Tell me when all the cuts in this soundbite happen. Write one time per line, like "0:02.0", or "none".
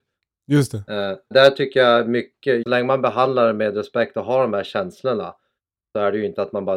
0:01.3
0:02.6